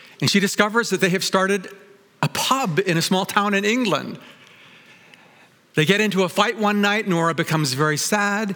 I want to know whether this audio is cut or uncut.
uncut